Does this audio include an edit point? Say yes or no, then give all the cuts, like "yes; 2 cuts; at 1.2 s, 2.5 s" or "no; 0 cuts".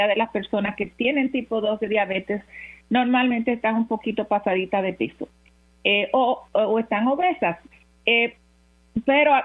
no; 0 cuts